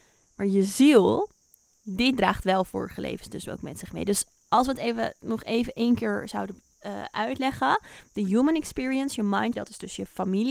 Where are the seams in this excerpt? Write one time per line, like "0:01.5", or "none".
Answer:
0:09.5